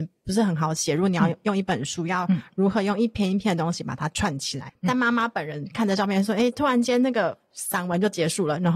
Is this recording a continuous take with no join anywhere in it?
no; 2 cuts; at 4.7 s, 6.5 s

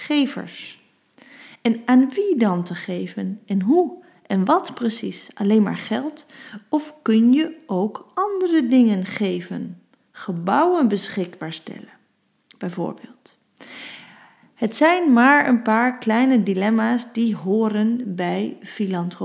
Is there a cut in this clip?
no; 0 cuts

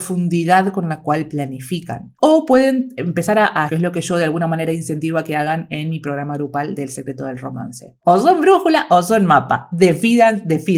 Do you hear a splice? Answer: yes; 3 cuts; at 2.2 s, 3.7 s, 8.0 s

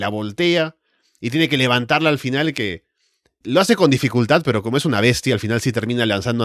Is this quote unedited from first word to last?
no; 1 cut; at 3.4 s

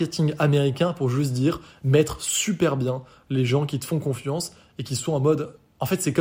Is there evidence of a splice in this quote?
no; 0 cuts

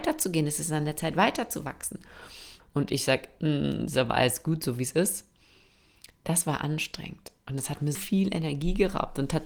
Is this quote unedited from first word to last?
no; 2 cuts; at 2.6 s, 8.0 s

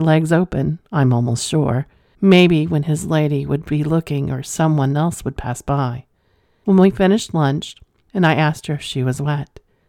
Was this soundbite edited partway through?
yes; 3 cuts; at 2.1 s, 6.6 s, 8.1 s

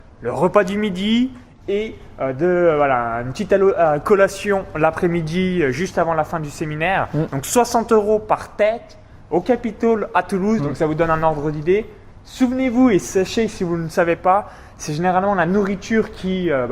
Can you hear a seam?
no; 0 cuts

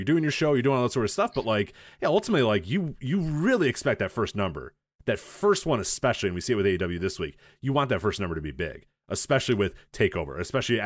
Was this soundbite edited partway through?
no; 0 cuts

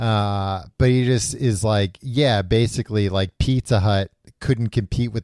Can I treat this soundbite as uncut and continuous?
yes; 0 cuts

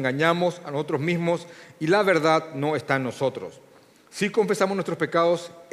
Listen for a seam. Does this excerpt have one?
yes; 1 cut; at 3.9 s

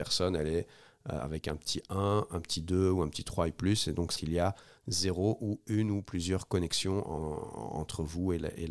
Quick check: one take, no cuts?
no; 1 cut; at 4.2 s

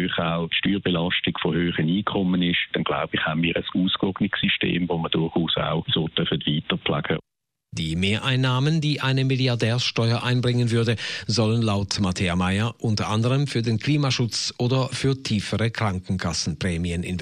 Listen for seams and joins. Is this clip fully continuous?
yes; 0 cuts

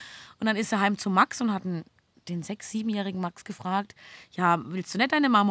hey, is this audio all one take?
yes; 0 cuts

